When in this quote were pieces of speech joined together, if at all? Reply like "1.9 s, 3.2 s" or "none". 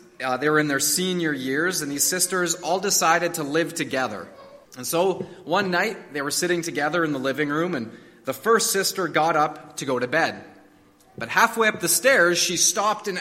4.7 s

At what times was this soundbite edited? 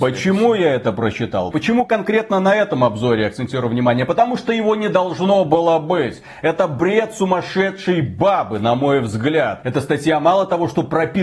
1.5 s

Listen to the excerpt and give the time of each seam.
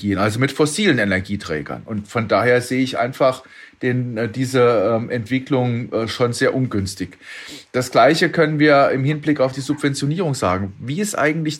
none

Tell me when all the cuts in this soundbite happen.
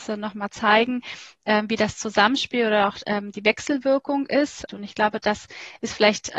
4.7 s

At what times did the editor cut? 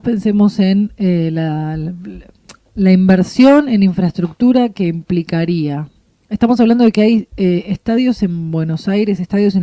none

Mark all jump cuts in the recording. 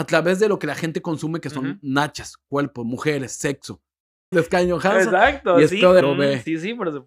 4.3 s, 6.0 s

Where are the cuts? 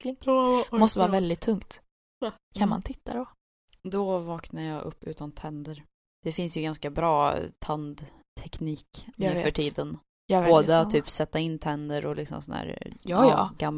none

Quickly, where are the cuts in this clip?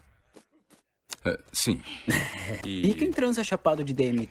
2.6 s

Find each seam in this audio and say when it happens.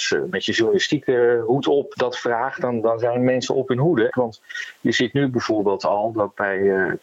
1.9 s, 4.1 s

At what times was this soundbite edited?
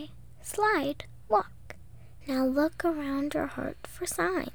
2.2 s

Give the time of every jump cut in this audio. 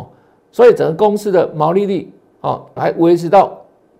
2.8 s

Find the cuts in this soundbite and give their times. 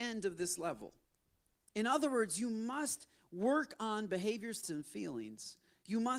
1.6 s, 4.6 s

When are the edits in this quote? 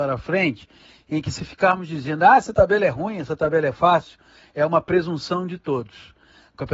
none

